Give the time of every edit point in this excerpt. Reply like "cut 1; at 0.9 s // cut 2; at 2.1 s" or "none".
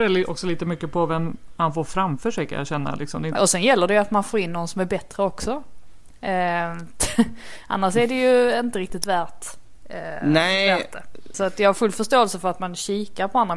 cut 1; at 3.4 s // cut 2; at 11.3 s